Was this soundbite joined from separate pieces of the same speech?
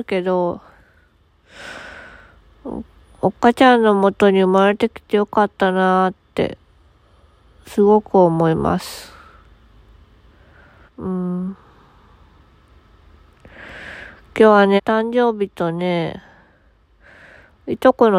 yes; 2 cuts; at 10.9 s, 14.8 s

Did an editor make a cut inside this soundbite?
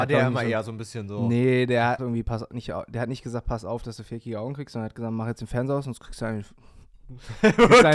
yes; 1 cut; at 2.0 s

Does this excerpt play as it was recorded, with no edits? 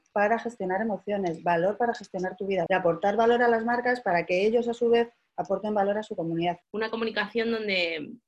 no; 2 cuts; at 2.7 s, 6.6 s

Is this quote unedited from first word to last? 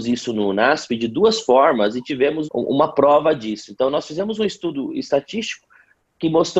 no; 1 cut; at 2.5 s

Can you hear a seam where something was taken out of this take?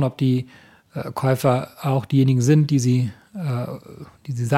no; 0 cuts

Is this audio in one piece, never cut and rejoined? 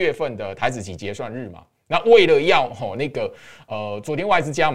yes; 0 cuts

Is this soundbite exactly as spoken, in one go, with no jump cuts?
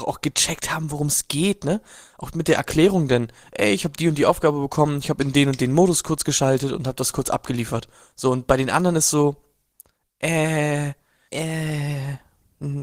no; 1 cut; at 11.3 s

